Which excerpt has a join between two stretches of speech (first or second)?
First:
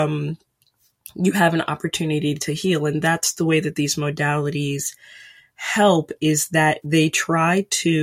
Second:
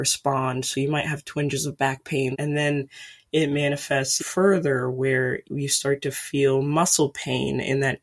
second